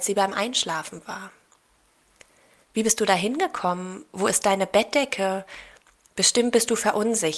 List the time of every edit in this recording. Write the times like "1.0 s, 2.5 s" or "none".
2.6 s, 6.1 s